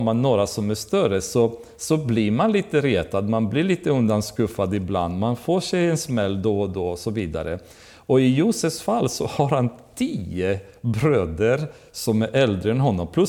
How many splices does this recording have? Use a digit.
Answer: 0